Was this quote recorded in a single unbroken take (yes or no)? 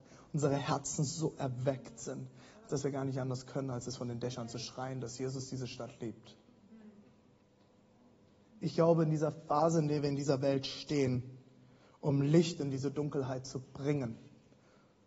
yes